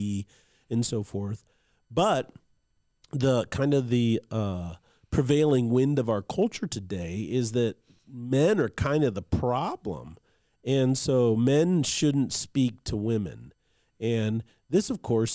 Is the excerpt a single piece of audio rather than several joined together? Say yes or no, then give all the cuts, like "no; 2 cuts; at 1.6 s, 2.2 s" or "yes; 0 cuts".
yes; 0 cuts